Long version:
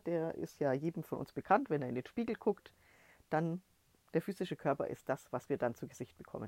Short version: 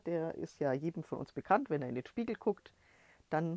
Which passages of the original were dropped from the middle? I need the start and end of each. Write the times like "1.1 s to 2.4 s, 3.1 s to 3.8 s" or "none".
none